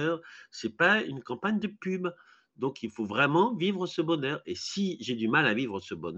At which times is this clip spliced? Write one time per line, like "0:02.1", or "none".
none